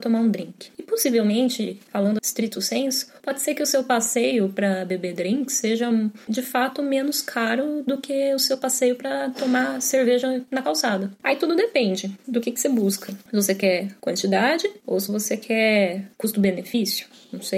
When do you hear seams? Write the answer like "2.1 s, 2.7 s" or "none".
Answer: 2.2 s